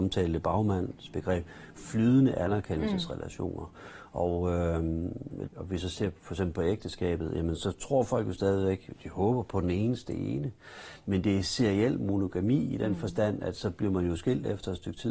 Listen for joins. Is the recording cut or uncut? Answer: cut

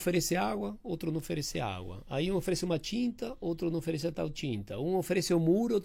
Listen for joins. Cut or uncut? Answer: uncut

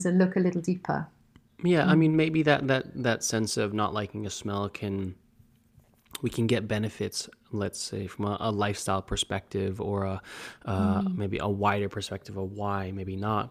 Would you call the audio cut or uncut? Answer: uncut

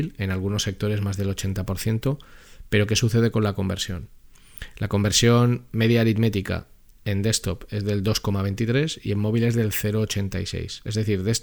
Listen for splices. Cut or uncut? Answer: uncut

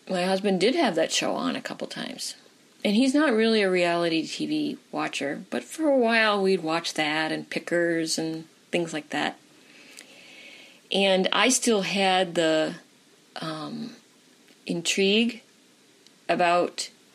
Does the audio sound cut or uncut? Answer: uncut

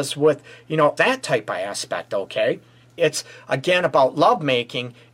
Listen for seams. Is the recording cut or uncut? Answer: cut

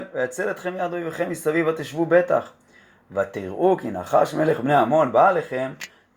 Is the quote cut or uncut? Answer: uncut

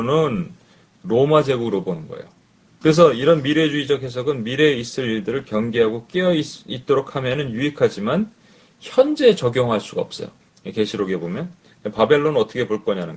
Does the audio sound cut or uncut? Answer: cut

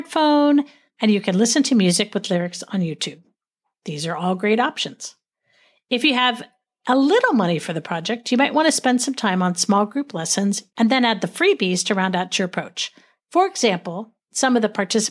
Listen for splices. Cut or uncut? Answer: cut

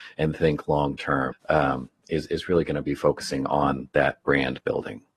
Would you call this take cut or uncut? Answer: cut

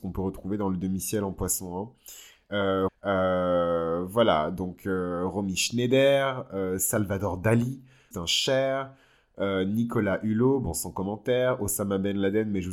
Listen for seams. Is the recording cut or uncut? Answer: cut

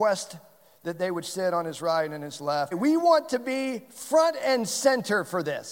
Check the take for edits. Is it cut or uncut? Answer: cut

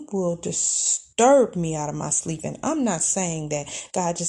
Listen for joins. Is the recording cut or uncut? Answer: uncut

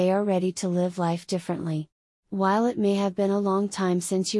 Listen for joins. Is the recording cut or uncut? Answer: cut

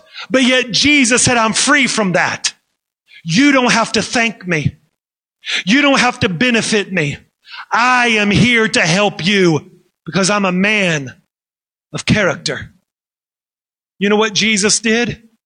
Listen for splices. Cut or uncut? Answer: uncut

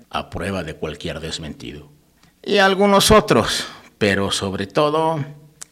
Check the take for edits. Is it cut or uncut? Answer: cut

